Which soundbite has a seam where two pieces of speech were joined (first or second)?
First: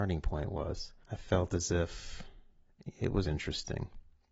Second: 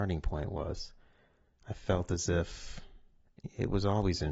first